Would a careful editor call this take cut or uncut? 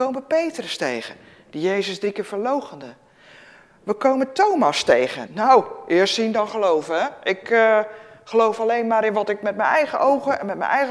cut